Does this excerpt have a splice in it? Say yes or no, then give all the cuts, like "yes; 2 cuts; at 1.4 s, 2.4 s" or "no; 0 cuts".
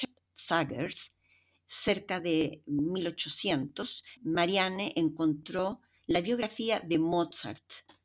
yes; 1 cut; at 4.2 s